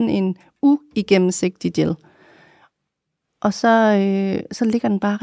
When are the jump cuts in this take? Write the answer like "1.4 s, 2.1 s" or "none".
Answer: none

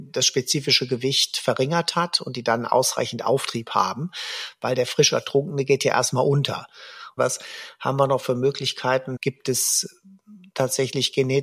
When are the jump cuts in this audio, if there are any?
7.2 s, 9.2 s

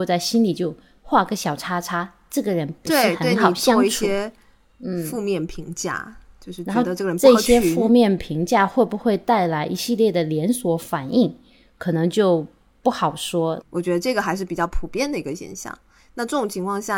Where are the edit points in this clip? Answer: 13.6 s

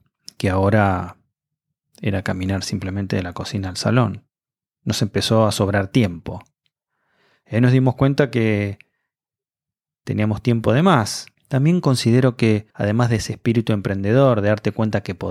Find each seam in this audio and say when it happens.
11.3 s, 12.7 s

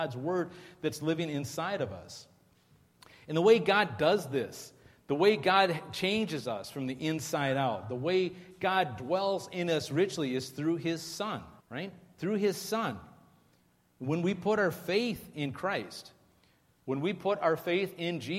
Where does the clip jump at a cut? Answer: 11.6 s

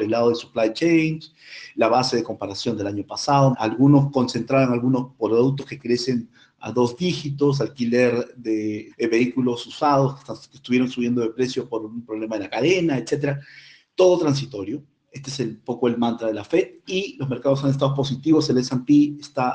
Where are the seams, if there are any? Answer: 3.5 s, 8.9 s

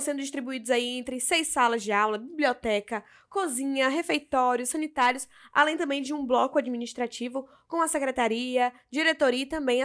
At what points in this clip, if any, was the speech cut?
none

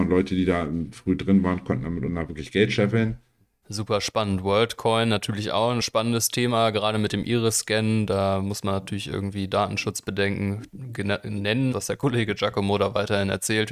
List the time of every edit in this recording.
3.6 s, 11.7 s

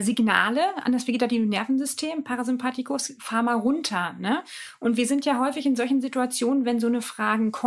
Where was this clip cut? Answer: none

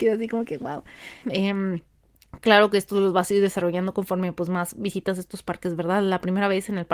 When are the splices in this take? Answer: 1.2 s

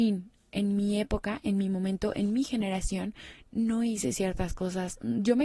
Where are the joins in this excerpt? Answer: none

